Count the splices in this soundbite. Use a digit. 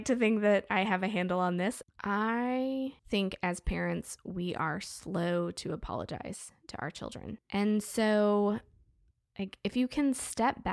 3